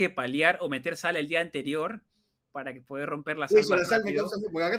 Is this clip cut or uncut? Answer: uncut